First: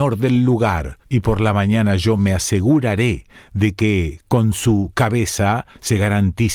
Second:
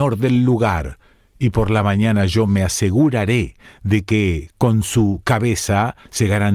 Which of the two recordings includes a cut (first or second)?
first